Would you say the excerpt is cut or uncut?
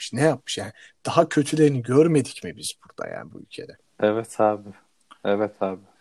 uncut